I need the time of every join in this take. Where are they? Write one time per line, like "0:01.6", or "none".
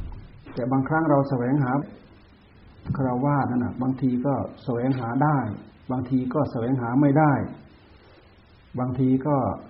0:01.8